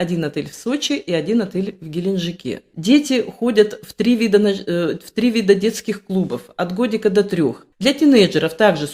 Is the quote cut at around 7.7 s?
yes; 2 cuts; at 2.7 s, 7.7 s

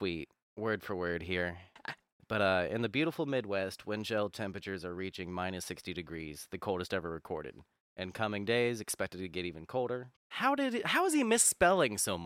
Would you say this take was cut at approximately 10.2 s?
yes; 2 cuts; at 1.8 s, 10.2 s

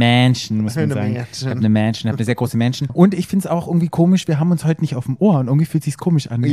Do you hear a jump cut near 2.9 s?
yes; 1 cut; at 2.9 s

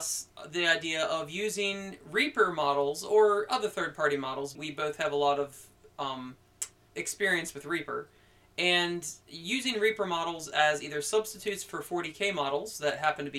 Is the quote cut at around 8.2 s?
no; 2 cuts; at 4.6 s, 6.9 s

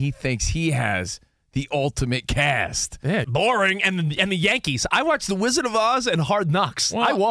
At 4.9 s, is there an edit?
no; 1 cut; at 3.2 s

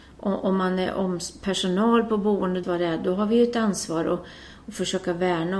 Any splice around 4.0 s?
no; 1 cut; at 2.6 s

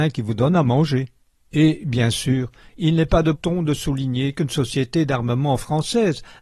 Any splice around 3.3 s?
yes; 2 cuts; at 1.5 s, 3.3 s

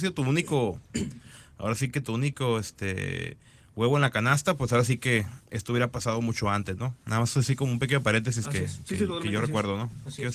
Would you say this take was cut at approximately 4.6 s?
no; 0 cuts

